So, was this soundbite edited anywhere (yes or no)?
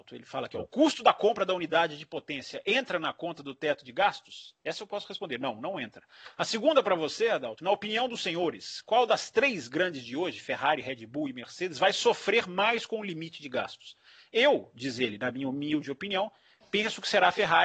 no